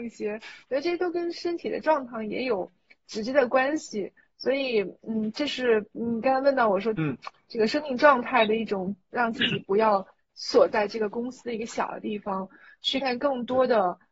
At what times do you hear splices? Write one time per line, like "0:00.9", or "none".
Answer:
0:06.9
0:09.1
0:13.0